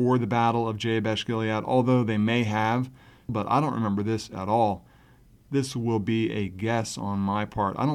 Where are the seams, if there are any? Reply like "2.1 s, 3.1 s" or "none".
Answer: 3.3 s

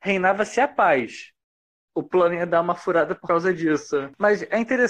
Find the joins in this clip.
1.9 s

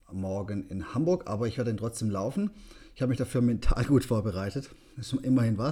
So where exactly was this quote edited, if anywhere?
none

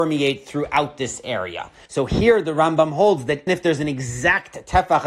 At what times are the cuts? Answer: 1.9 s, 3.5 s

